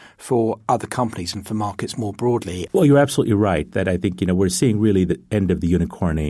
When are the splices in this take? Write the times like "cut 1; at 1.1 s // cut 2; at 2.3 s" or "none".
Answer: cut 1; at 2.7 s

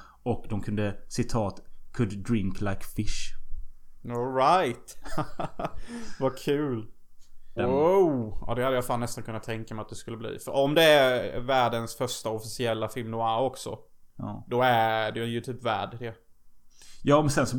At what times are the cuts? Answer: cut 1; at 7.6 s

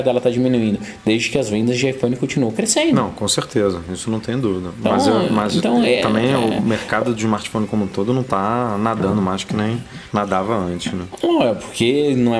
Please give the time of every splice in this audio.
none

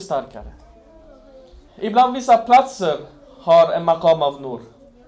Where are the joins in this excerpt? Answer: cut 1; at 1.7 s

